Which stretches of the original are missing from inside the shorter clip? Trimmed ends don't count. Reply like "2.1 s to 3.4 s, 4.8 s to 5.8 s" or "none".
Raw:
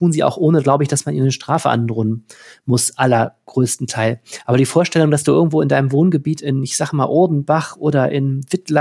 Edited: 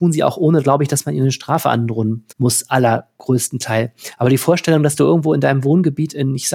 2.3 s to 2.6 s

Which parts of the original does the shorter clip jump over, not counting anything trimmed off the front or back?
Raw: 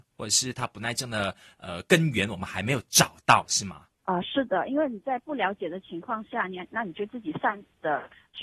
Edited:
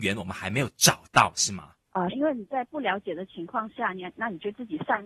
4.2 s to 4.7 s

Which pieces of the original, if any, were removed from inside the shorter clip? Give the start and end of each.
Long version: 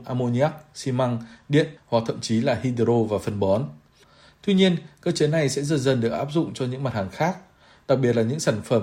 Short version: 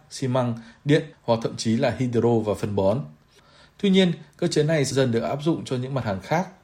5.6 s to 5.8 s

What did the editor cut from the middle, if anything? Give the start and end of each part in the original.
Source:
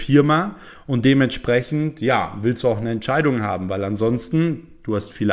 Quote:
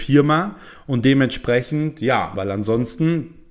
2.3 s to 3.7 s

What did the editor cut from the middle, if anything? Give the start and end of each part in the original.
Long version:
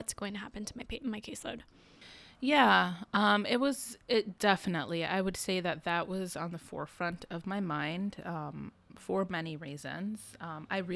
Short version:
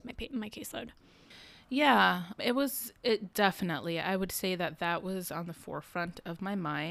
3.1 s to 3.4 s

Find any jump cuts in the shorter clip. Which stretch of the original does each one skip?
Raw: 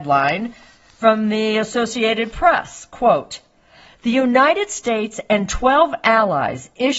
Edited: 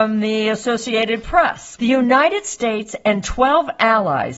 2.8 s to 4.0 s

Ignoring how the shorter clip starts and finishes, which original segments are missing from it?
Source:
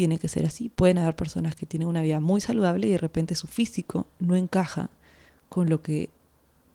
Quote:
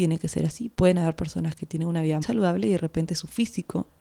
2.2 s to 2.4 s

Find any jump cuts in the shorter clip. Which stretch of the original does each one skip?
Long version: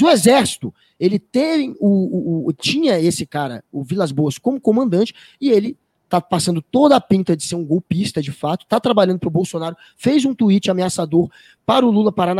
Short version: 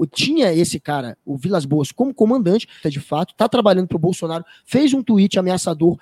5.3 s to 8.1 s

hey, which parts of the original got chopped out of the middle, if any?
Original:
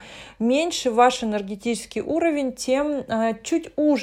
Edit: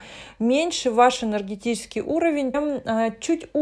2.5 s to 2.8 s

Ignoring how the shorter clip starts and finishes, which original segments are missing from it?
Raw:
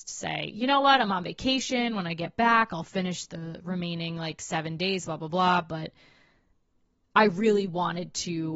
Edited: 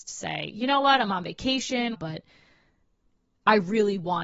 1.9 s to 5.6 s

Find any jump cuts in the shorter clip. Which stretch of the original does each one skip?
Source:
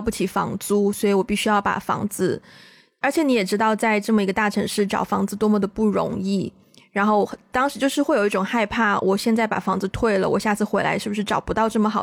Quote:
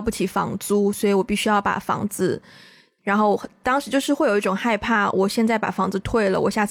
3.0 s to 6.9 s

